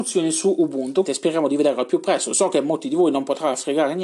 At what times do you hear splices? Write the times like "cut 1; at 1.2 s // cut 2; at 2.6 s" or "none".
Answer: cut 1; at 1.1 s